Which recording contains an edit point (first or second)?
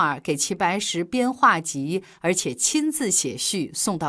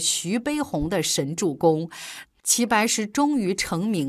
second